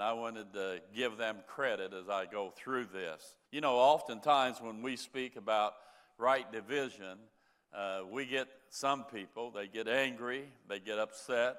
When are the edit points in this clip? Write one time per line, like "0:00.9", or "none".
0:03.4